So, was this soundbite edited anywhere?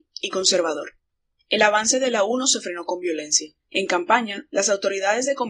yes; 2 cuts; at 1.4 s, 3.6 s

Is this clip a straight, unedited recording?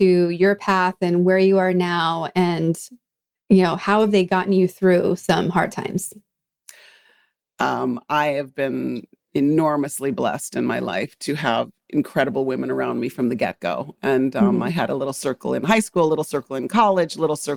yes; 0 cuts

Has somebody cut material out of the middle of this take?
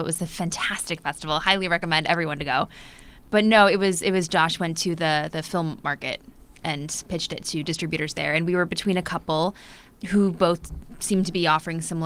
no; 0 cuts

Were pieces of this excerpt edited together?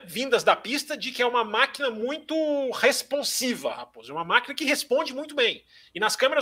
no; 0 cuts

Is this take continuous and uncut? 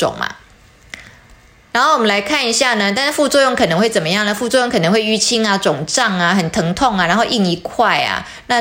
yes; 0 cuts

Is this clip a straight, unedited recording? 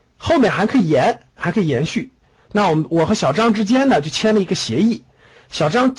yes; 0 cuts

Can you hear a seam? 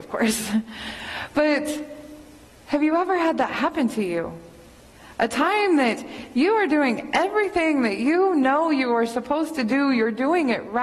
no; 0 cuts

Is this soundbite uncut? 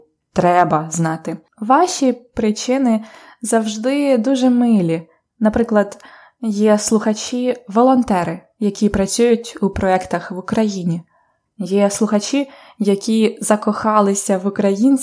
yes; 0 cuts

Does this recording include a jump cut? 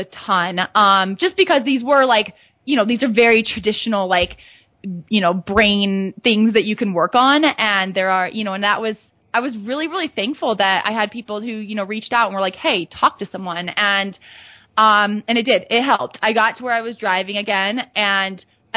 no; 0 cuts

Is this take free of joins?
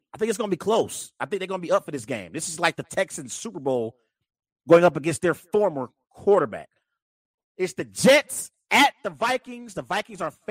no; 1 cut; at 7.4 s

